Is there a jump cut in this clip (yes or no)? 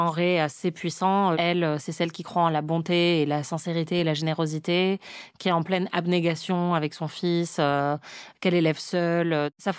yes